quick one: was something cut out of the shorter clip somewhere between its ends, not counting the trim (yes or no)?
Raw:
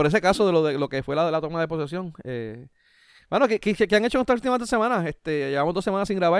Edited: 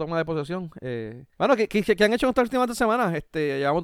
yes